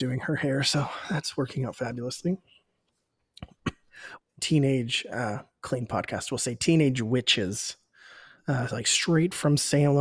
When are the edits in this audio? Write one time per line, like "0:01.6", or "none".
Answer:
0:04.2